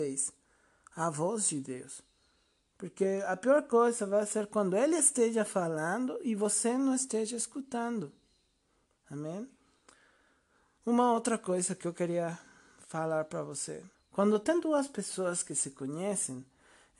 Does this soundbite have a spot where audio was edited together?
yes; 2 cuts; at 8.9 s, 13.9 s

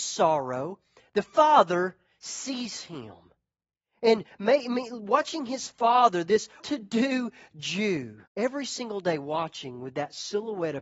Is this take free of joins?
no; 2 cuts; at 6.6 s, 8.3 s

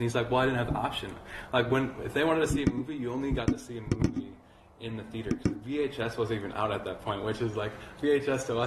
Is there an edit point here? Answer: no; 0 cuts

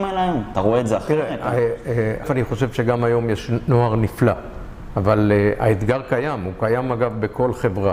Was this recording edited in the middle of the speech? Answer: yes; 1 cut; at 2.2 s

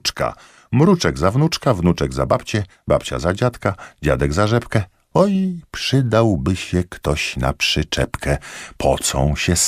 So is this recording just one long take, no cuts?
yes; 0 cuts

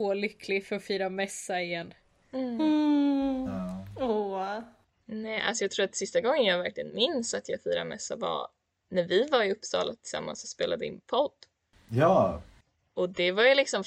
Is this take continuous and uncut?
yes; 0 cuts

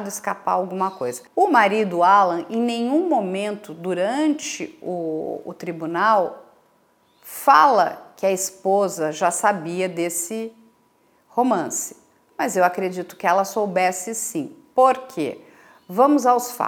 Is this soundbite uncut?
yes; 0 cuts

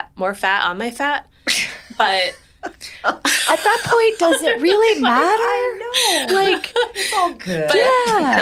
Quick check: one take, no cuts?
yes; 0 cuts

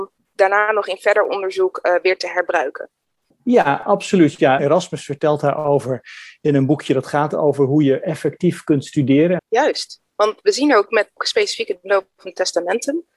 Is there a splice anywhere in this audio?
yes; 2 cuts; at 4.6 s, 9.4 s

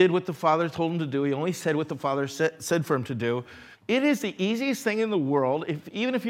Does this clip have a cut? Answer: yes; 1 cut; at 3.7 s

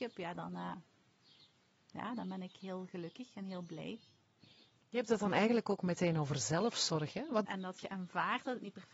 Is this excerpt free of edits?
no; 1 cut; at 7.4 s

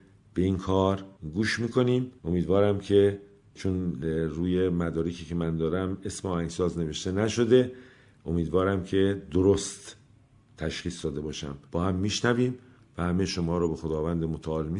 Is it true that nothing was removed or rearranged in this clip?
no; 1 cut; at 11.7 s

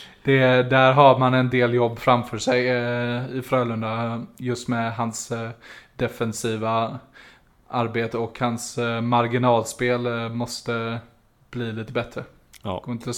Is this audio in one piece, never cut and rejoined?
yes; 0 cuts

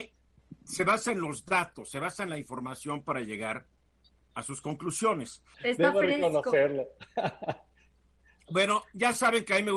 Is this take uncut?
no; 1 cut; at 5.5 s

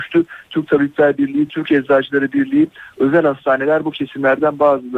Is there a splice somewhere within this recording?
no; 0 cuts

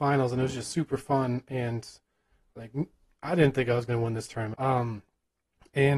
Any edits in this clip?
yes; 1 cut; at 4.5 s

